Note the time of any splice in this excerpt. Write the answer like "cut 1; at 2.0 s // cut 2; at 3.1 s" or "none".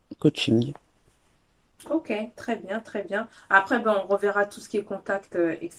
none